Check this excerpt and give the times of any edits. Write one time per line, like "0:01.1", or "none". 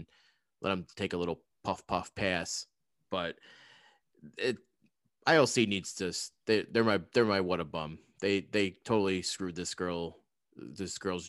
none